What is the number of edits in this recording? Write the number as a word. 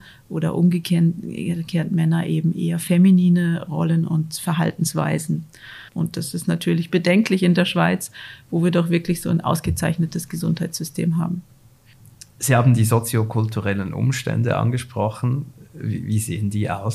one